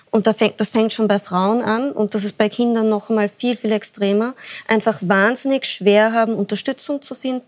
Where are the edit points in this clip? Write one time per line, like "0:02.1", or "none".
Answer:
none